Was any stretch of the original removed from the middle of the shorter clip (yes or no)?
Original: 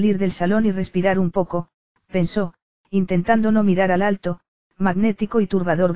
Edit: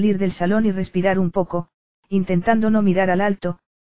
yes